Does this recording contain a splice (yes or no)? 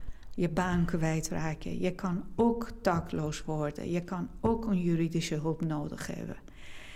no